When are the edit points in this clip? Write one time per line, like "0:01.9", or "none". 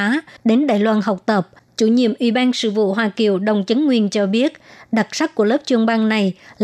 0:01.7